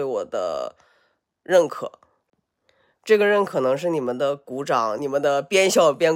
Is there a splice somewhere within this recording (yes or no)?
yes